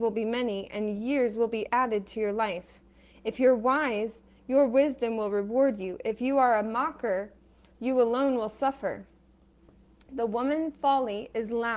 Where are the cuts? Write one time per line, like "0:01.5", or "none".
none